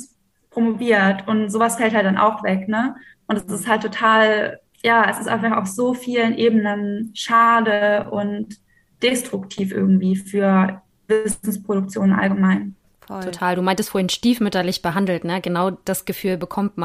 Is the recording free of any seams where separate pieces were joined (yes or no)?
no